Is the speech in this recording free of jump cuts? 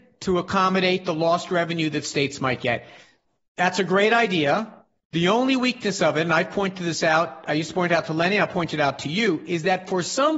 yes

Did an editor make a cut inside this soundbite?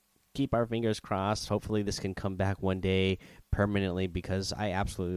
no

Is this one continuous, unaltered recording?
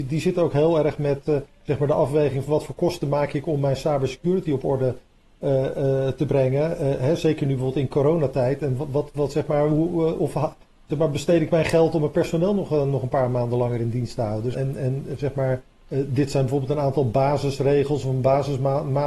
no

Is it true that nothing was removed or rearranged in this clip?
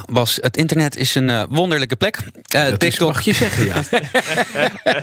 yes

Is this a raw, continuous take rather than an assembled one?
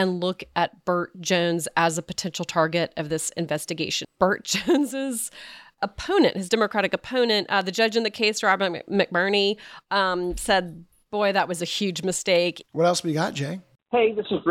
no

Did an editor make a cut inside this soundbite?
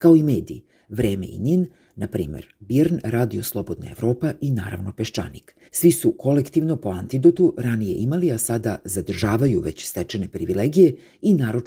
yes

